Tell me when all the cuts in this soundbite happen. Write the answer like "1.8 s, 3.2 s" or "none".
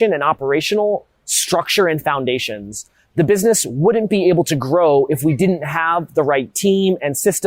none